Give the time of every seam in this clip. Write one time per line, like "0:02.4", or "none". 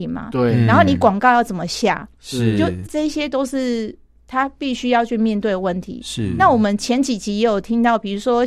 0:02.9